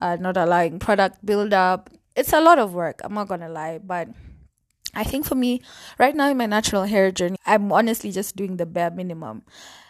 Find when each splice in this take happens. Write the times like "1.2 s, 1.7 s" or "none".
7.4 s